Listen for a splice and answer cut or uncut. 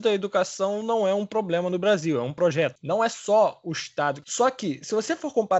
cut